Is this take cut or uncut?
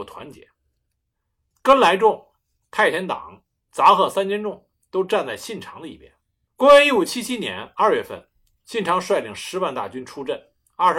cut